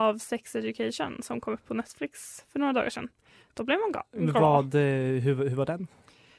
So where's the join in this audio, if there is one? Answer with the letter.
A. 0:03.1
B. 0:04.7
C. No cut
C